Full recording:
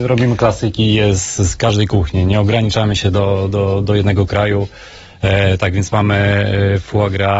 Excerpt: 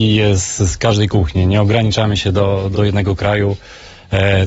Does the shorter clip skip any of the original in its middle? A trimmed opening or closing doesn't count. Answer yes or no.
yes